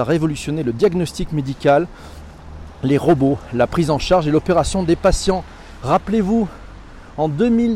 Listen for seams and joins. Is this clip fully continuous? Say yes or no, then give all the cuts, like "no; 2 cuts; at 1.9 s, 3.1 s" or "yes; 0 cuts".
yes; 0 cuts